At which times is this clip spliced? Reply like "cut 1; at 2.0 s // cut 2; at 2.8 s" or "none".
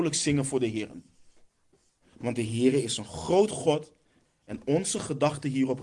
cut 1; at 2.0 s // cut 2; at 4.2 s